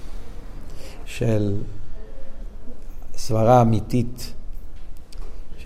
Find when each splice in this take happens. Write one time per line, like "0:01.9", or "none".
0:01.0

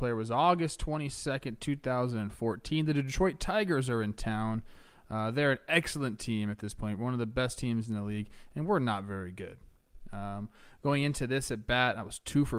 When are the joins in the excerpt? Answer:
none

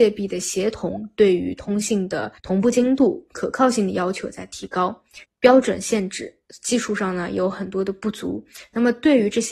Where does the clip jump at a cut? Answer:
0:02.4
0:05.2

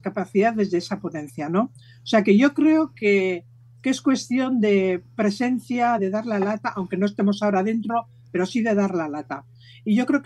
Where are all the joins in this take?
none

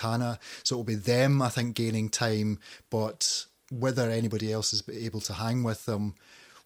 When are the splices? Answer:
none

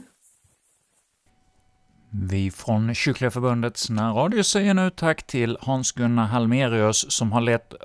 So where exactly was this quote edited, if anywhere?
none

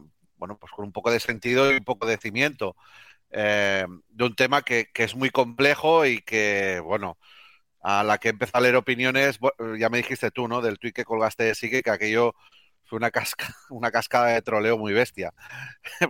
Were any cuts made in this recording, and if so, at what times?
none

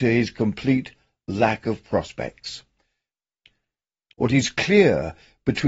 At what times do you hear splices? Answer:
0:04.1

